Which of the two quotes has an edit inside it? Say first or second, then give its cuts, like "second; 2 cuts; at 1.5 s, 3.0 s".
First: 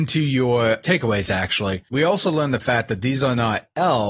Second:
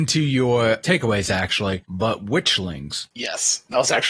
second; 1 cut; at 1.8 s